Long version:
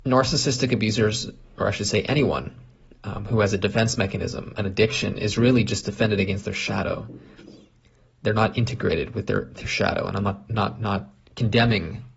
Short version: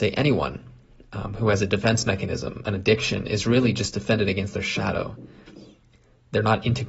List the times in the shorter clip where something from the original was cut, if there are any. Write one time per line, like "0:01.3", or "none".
none